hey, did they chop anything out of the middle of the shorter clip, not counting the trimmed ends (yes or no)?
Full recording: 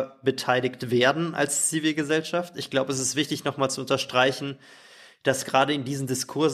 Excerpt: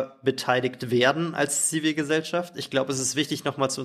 no